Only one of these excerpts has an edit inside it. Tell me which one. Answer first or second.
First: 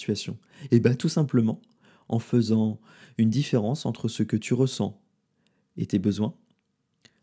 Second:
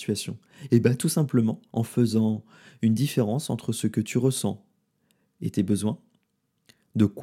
second